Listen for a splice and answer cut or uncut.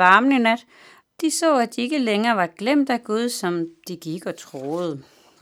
cut